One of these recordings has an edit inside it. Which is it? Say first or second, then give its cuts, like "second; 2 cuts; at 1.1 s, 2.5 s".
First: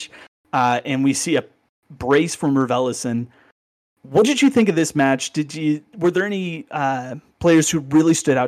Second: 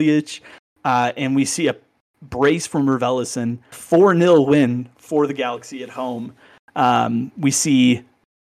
second; 1 cut; at 3.7 s